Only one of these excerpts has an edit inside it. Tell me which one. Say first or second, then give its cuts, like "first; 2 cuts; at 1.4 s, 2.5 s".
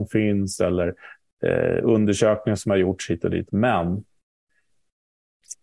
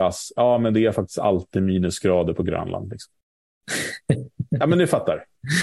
first; 1 cut; at 3.5 s